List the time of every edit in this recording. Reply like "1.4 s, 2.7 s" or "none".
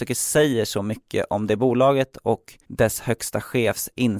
2.6 s